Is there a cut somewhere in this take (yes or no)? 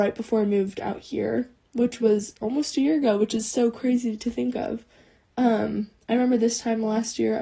no